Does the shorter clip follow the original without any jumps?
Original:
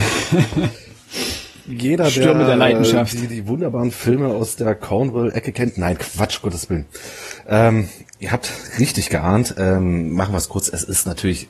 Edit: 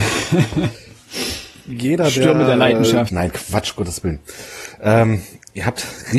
no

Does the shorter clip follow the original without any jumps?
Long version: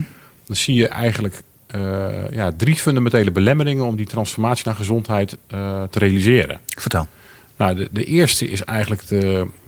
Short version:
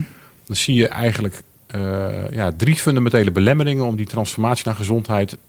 yes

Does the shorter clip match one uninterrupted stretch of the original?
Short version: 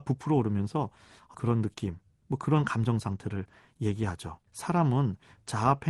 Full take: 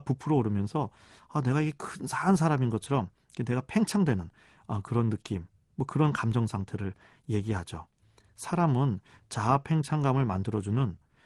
no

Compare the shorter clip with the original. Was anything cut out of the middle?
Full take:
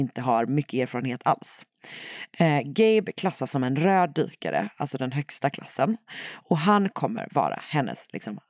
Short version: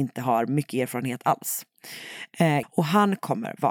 yes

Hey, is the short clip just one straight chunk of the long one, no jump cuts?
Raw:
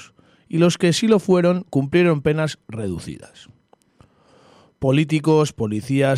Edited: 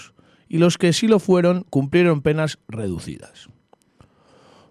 yes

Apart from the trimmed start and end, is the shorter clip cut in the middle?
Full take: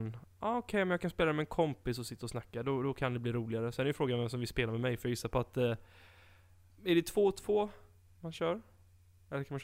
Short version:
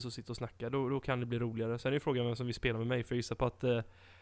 no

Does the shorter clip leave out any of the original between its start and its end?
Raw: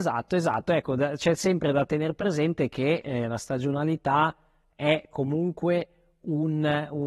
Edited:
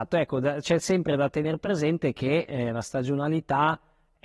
no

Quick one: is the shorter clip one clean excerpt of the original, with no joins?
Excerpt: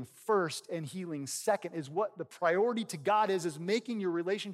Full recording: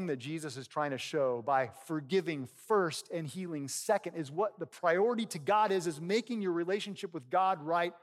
yes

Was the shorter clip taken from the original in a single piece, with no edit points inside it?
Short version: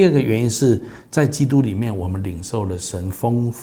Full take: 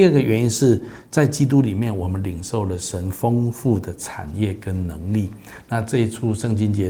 yes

